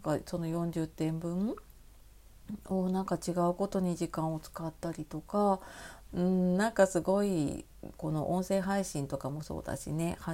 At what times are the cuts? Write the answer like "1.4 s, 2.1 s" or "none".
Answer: 6.1 s, 7.9 s